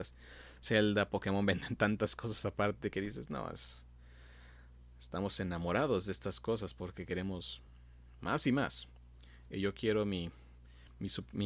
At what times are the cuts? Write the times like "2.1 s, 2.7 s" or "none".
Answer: none